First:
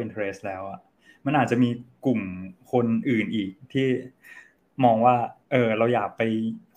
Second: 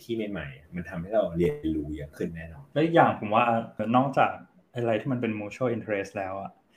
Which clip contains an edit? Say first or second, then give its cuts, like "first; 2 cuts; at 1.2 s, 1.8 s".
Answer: second; 1 cut; at 3.8 s